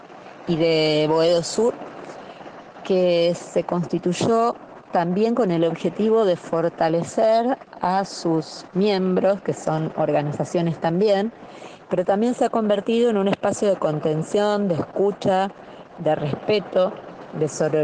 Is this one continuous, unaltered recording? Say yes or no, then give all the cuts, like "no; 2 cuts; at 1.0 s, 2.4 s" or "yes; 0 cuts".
no; 1 cut; at 11.8 s